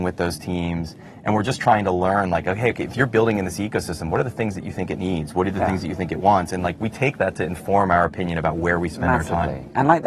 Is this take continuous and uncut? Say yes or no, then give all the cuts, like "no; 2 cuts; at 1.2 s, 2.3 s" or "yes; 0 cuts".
yes; 0 cuts